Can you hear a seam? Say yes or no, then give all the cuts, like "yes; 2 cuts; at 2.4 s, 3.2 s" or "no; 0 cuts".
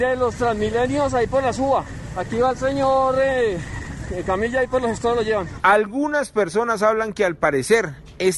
yes; 1 cut; at 4.1 s